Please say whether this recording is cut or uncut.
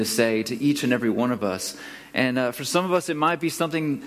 uncut